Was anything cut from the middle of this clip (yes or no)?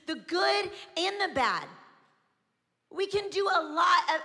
no